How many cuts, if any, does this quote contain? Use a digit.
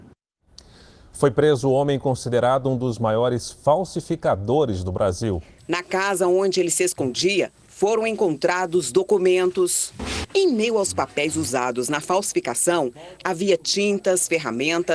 2